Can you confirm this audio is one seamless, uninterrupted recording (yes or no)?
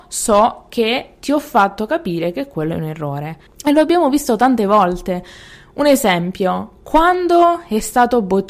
no